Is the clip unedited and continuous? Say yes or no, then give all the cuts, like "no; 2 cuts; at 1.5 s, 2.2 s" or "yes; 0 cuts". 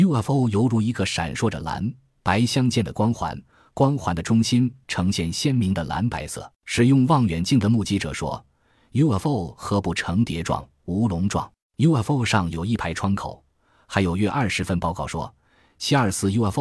no; 2 cuts; at 6.6 s, 11.6 s